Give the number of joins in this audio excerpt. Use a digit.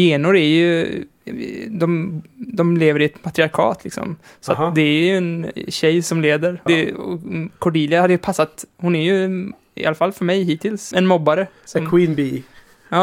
2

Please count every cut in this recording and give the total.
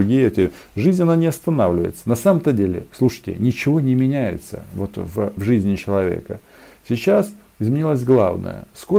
1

